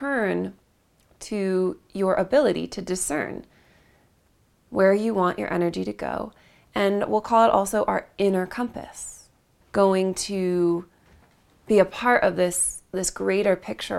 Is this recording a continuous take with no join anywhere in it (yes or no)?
no